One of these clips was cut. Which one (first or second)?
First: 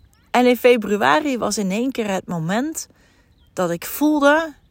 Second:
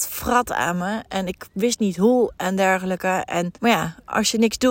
second